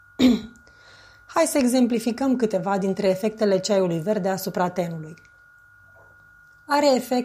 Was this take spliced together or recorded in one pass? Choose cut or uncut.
uncut